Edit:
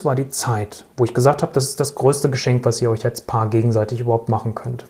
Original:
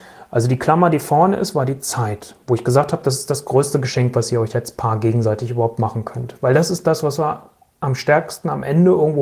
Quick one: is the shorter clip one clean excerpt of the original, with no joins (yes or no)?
yes